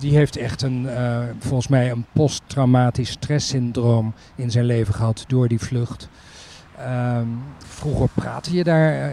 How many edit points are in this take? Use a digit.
1